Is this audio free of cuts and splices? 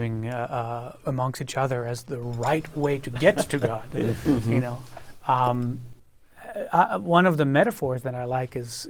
no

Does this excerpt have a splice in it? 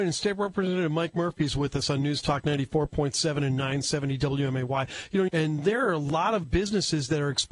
yes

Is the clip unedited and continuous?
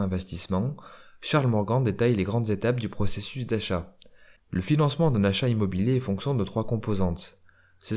no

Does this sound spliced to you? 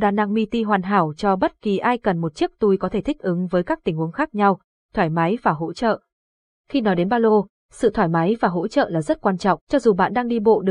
yes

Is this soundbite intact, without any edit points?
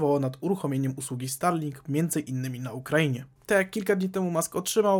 no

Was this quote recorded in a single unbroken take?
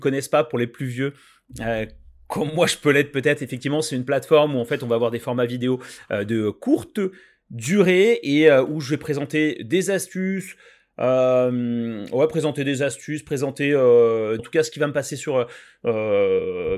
no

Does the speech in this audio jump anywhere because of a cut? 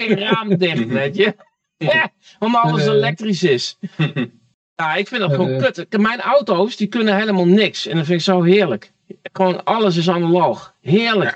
no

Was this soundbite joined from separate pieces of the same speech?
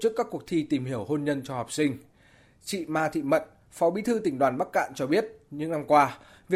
no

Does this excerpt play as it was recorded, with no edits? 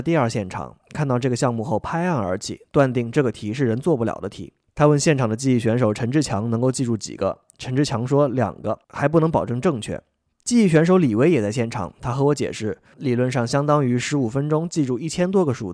no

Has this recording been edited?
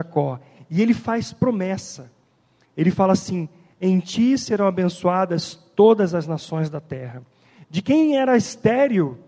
yes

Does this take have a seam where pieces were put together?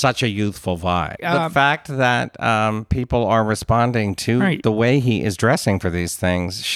yes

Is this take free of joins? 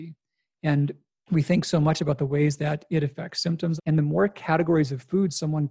no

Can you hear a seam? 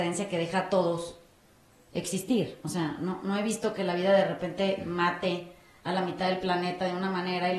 no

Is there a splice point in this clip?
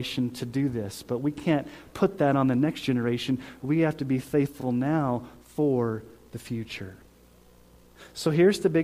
no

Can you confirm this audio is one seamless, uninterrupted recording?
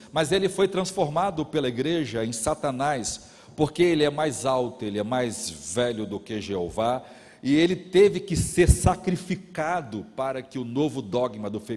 yes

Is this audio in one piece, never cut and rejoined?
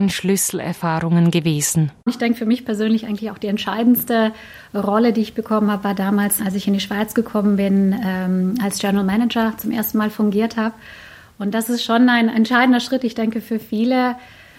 no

